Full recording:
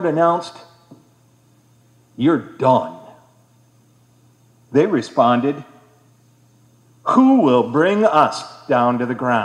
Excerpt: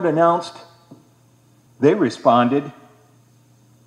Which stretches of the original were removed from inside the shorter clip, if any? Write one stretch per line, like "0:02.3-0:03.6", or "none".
0:01.7-0:04.6